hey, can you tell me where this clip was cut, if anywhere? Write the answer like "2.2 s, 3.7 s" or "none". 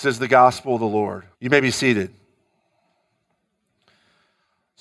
1.3 s